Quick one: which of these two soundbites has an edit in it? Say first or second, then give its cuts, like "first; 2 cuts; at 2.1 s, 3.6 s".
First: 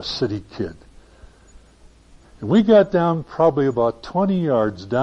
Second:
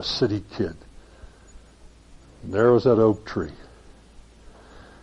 first; 1 cut; at 2.2 s